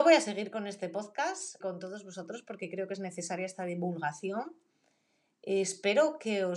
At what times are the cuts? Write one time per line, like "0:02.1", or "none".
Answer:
0:01.6